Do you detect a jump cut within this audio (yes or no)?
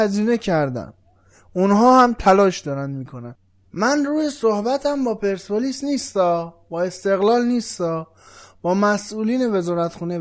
no